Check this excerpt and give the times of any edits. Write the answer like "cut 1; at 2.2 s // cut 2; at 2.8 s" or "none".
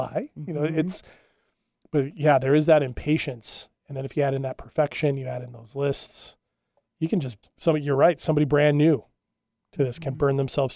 cut 1; at 7.4 s